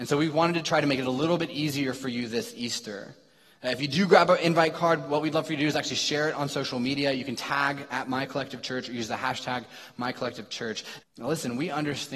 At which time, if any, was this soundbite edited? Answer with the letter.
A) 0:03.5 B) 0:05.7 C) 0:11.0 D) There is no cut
C